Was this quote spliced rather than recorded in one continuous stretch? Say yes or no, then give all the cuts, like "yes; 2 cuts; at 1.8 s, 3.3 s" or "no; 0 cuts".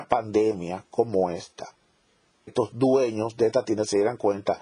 yes; 1 cut; at 2.5 s